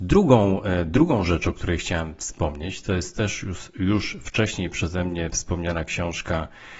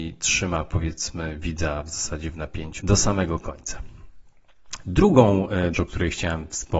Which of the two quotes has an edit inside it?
second; 2 cuts; at 2.8 s, 5.7 s

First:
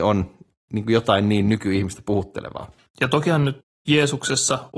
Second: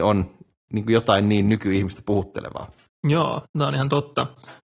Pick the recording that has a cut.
first; 1 cut; at 2.9 s

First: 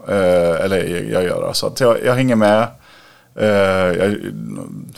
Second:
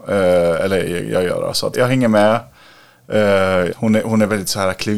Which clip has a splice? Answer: second; 2 cuts; at 1.7 s, 3.7 s

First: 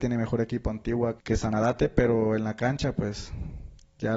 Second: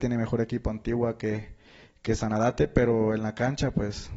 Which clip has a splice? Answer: first; 1 cut; at 1.2 s

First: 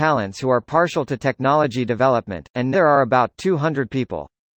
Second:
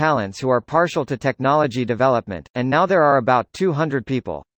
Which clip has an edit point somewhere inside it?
first; 1 cut; at 2.7 s

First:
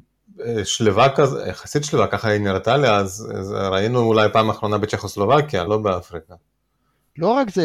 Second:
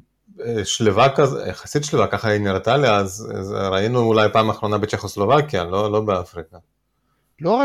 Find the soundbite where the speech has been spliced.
first; 1 cut; at 5.7 s

